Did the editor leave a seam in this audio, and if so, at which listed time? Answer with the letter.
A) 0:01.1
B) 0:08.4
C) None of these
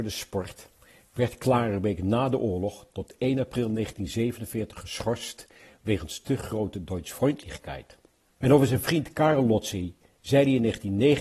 B